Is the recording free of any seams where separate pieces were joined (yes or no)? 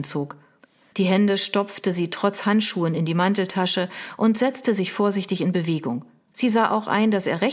no